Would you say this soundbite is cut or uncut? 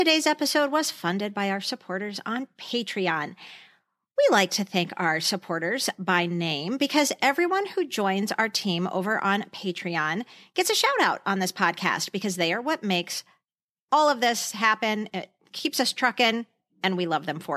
uncut